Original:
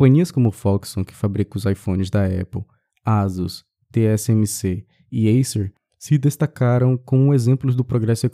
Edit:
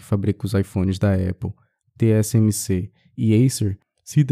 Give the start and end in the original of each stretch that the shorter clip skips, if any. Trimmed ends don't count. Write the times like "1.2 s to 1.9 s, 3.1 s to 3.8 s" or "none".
2.9 s to 3.8 s